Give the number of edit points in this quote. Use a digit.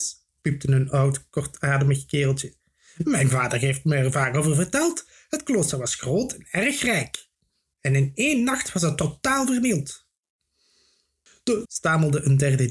1